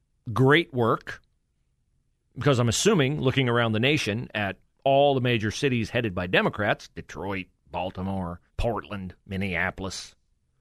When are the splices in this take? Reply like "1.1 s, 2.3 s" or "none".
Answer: 8.5 s